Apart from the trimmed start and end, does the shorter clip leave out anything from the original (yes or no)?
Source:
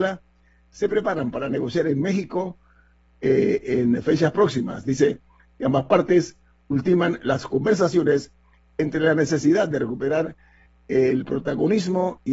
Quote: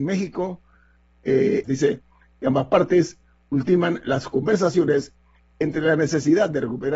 yes